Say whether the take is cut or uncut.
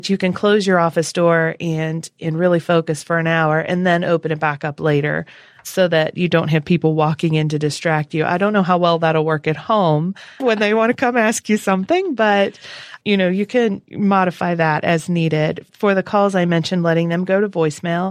cut